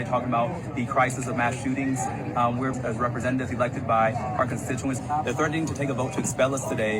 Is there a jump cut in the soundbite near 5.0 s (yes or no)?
yes